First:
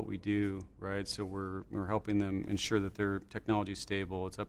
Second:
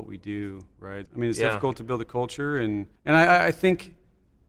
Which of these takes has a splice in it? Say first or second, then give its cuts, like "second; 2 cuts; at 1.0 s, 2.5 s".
second; 2 cuts; at 1.1 s, 3.0 s